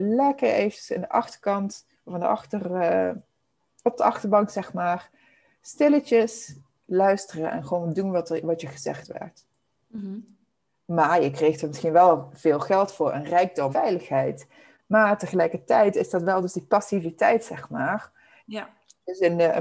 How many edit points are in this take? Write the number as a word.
two